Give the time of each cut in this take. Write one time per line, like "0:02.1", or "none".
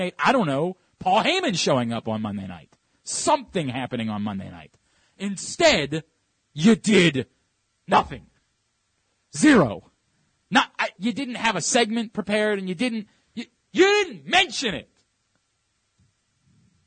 0:11.0

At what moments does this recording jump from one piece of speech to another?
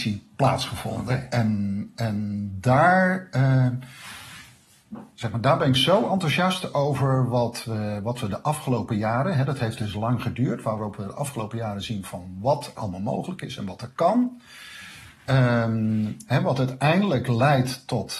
0:12.8

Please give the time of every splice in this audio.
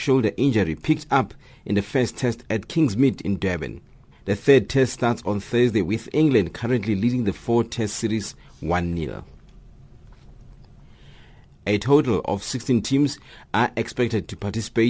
0:04.1
0:11.4

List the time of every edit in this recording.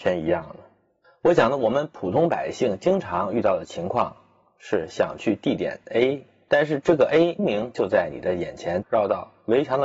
0:07.4
0:08.8

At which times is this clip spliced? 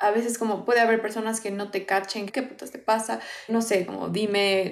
0:02.3
0:03.5

